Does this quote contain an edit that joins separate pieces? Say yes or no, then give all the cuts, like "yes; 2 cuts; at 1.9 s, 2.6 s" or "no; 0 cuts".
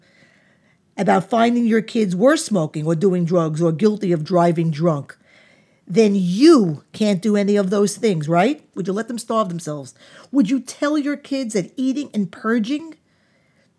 yes; 1 cut; at 8.7 s